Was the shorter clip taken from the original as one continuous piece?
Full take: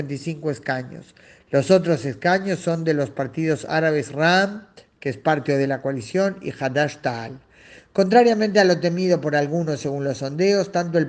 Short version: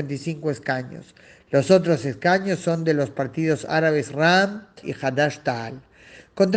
no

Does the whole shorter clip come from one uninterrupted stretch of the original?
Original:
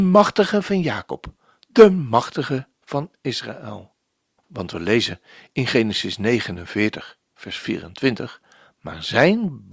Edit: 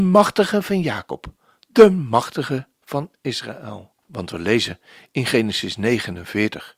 no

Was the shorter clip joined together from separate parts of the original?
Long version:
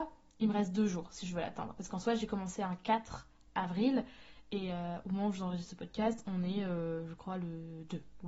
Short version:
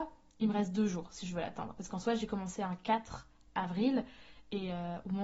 no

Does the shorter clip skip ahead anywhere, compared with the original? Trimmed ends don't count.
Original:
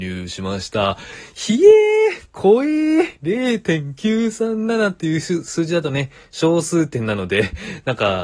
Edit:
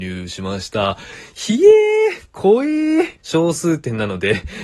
yes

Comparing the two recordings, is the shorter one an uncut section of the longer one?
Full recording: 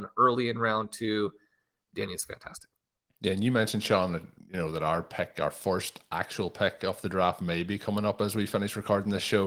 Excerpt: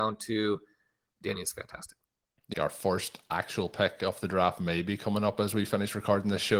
no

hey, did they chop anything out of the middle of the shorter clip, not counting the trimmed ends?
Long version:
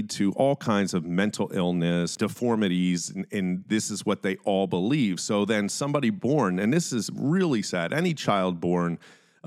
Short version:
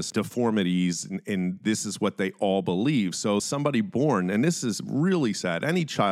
yes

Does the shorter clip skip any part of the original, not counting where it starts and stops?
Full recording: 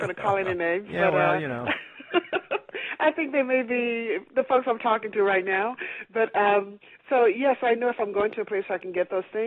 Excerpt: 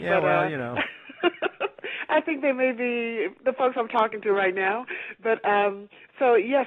no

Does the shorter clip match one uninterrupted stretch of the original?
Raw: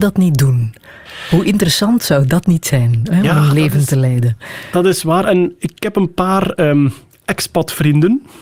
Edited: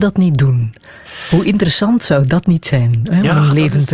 yes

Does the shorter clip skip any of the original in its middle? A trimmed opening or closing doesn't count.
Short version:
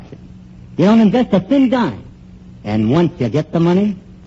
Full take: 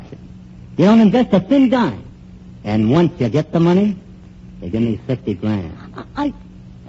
no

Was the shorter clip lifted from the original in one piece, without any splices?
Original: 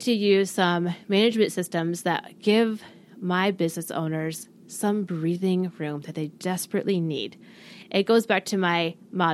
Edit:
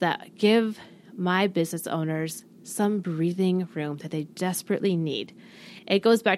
yes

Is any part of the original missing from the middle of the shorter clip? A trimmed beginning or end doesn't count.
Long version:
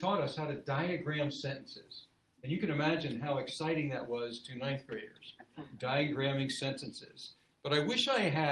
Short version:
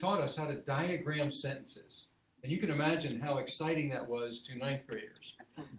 no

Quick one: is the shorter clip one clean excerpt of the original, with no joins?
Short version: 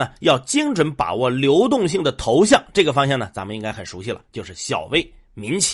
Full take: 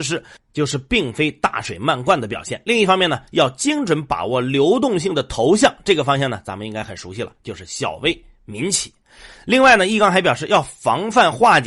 yes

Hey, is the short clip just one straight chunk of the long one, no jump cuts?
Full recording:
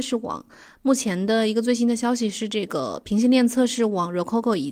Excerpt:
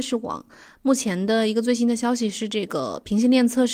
yes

